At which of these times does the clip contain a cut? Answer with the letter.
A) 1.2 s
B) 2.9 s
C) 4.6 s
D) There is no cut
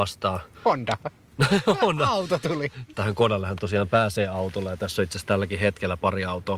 B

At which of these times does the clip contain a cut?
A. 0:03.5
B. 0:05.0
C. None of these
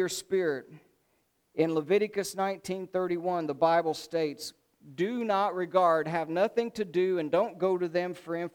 C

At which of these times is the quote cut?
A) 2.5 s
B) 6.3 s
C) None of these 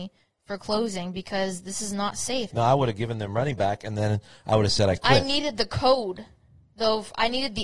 A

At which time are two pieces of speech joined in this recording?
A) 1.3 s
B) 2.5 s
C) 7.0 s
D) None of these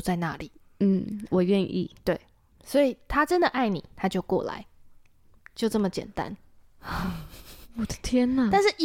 D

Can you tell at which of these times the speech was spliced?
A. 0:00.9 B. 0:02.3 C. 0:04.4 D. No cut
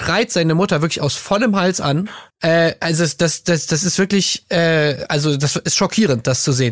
B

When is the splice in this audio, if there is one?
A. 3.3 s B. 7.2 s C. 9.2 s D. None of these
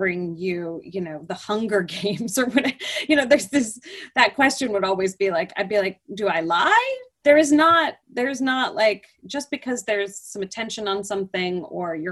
B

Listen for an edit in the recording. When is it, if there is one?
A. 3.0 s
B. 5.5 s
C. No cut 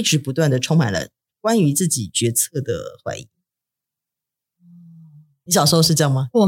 B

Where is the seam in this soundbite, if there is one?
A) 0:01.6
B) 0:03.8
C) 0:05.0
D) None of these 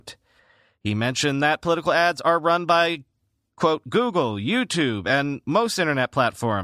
D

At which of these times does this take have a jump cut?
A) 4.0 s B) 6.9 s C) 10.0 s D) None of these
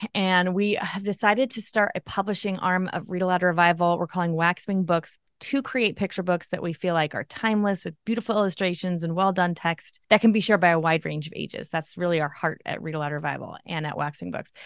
C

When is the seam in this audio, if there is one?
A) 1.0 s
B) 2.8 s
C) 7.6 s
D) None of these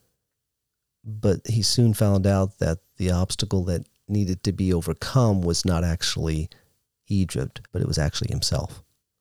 C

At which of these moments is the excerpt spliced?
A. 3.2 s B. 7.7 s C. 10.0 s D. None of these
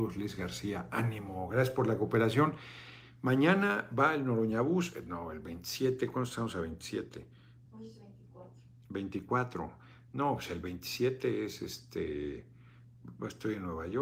B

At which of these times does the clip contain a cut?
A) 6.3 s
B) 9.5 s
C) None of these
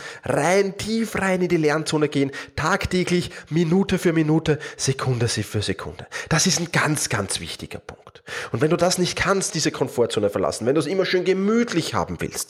B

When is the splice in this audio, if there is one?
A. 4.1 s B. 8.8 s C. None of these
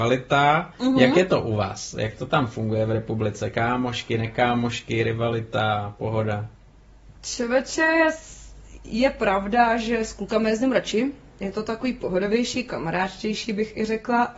C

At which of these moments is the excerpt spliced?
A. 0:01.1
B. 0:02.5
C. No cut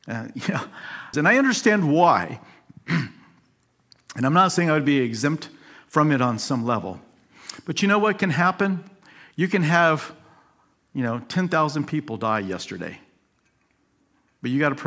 A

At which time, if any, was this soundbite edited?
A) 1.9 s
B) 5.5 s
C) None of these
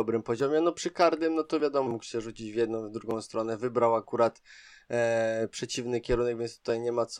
A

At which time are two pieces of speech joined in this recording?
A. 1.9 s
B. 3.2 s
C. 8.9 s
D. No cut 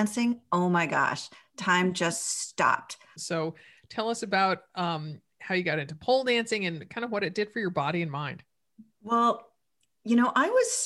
B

